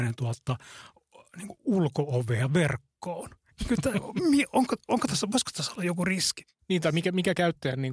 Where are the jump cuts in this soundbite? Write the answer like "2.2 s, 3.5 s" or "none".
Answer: none